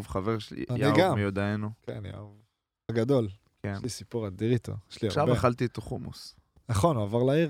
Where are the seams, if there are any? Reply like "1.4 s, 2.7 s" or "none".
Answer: 2.9 s